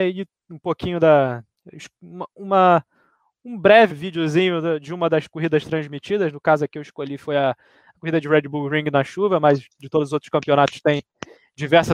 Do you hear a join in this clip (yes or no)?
yes